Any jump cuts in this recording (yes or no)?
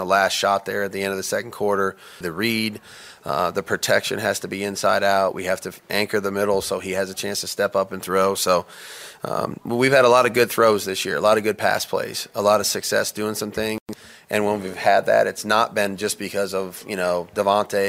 yes